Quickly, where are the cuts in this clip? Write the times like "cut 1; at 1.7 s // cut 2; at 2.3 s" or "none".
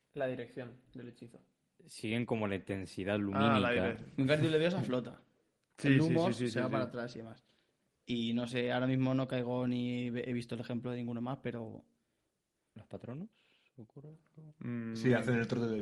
none